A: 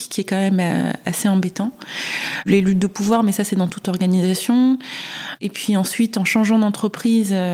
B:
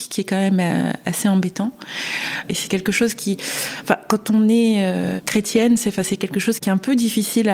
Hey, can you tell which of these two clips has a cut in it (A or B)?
B